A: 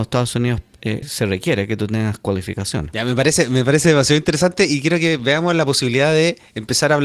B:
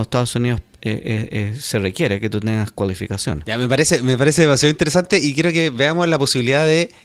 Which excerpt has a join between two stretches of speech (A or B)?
A